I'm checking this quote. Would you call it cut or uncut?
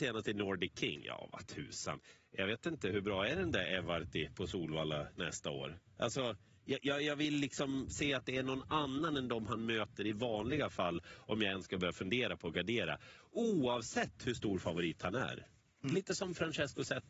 uncut